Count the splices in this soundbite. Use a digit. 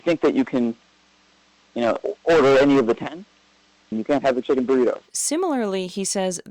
2